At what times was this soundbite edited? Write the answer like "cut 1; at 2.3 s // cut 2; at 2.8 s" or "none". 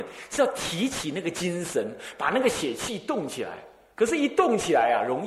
none